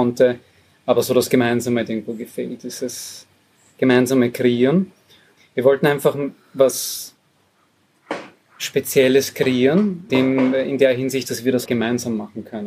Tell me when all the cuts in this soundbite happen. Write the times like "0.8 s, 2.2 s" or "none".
5.4 s, 10.1 s, 11.7 s